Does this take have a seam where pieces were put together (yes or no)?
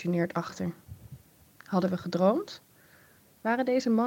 no